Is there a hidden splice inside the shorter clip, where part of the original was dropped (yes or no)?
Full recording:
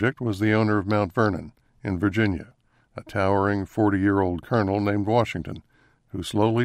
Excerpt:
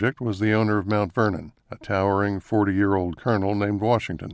yes